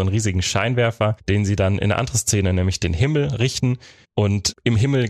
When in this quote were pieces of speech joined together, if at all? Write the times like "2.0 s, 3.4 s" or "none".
none